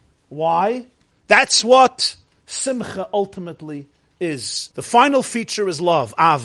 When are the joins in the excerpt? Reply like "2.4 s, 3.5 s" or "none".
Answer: 1.1 s, 4.7 s